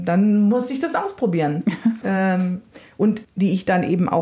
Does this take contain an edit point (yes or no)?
yes